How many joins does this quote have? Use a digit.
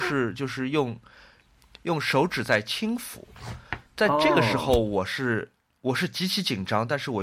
1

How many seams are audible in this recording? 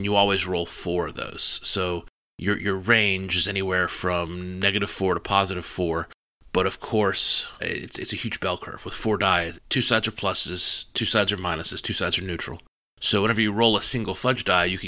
2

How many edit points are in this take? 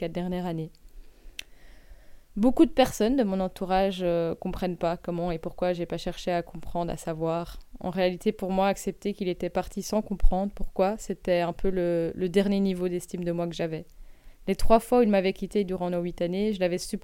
0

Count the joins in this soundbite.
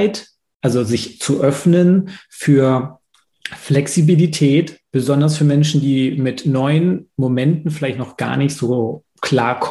1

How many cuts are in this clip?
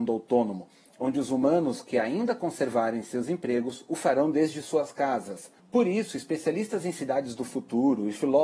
1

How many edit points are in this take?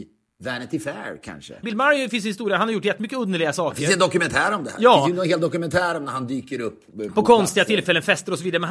1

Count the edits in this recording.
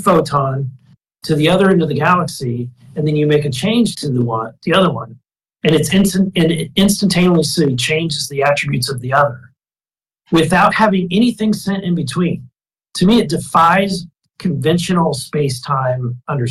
1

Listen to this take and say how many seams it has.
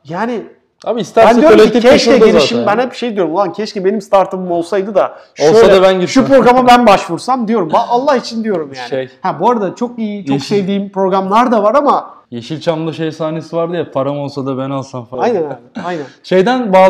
2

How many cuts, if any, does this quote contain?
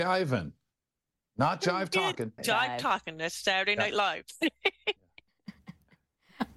1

